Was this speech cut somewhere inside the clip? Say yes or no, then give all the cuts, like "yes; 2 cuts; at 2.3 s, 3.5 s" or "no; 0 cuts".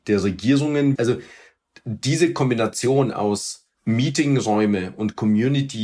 yes; 2 cuts; at 1.0 s, 3.7 s